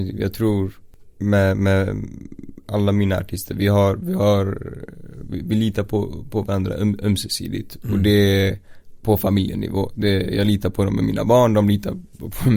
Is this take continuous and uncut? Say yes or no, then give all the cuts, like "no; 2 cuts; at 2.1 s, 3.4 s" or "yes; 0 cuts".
yes; 0 cuts